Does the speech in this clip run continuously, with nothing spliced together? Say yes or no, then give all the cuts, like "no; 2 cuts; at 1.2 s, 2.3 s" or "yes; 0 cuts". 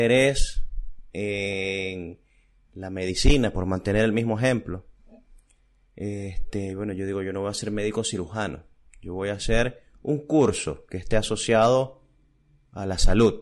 yes; 0 cuts